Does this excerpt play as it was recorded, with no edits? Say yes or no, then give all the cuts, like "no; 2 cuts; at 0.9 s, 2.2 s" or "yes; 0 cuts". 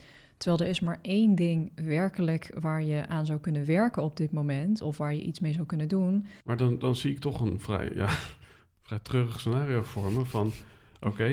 no; 1 cut; at 6.4 s